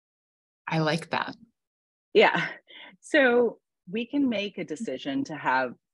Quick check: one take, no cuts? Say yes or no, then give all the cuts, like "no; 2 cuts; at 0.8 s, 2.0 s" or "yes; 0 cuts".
yes; 0 cuts